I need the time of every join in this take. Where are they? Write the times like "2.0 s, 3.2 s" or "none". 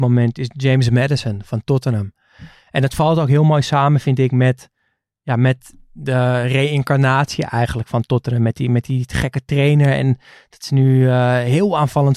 none